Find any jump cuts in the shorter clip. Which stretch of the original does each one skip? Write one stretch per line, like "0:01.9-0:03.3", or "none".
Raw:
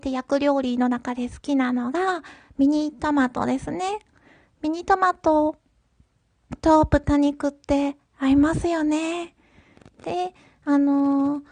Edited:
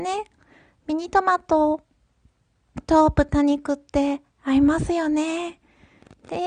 none